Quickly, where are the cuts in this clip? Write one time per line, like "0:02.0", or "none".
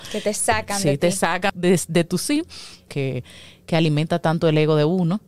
0:01.5
0:02.9